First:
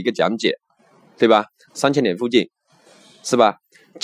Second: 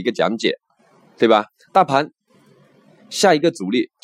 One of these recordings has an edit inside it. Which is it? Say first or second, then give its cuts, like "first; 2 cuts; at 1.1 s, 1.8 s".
first; 1 cut; at 1.7 s